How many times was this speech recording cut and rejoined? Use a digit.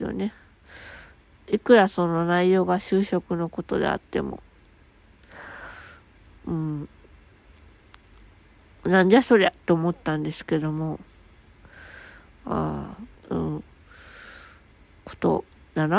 1